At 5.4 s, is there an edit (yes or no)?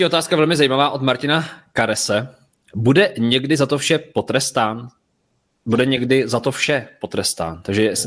no